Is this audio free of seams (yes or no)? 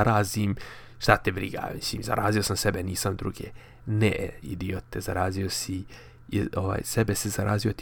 yes